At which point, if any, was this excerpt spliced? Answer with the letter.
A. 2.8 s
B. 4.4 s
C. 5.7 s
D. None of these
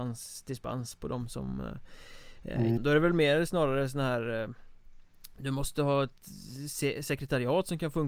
A